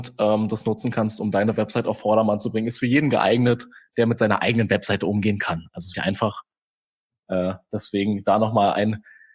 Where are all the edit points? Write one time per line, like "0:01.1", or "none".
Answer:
0:05.9

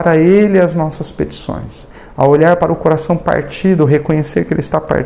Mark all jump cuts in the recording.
none

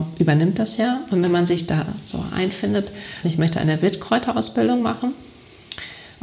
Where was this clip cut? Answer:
0:03.2

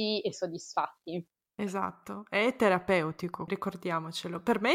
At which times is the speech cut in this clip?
0:03.5

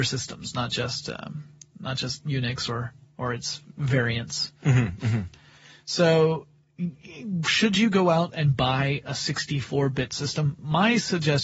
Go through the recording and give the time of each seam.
none

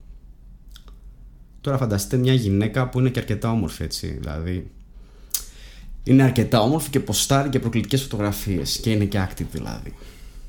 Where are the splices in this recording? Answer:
none

